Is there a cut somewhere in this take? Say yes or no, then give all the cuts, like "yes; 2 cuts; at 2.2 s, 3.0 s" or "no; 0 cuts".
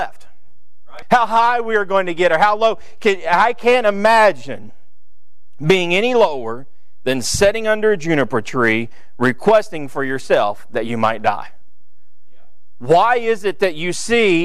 yes; 1 cut; at 1.0 s